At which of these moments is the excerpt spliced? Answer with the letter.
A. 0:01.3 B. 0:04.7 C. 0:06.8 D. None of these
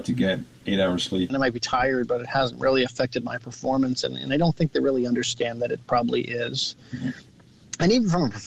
A